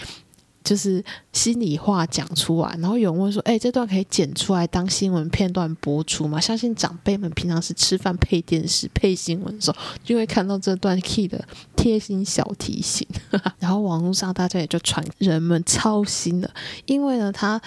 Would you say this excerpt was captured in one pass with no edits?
no; 2 cuts; at 13.5 s, 15.1 s

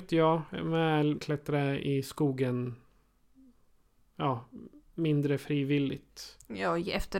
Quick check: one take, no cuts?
no; 1 cut; at 1.2 s

